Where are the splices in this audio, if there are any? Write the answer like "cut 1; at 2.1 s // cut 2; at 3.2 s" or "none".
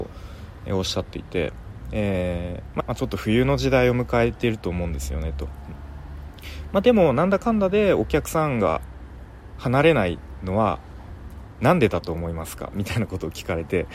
cut 1; at 2.8 s